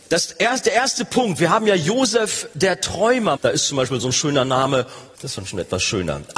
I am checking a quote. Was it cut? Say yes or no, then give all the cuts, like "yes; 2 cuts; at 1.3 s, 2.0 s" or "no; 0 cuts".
yes; 2 cuts; at 3.4 s, 5.1 s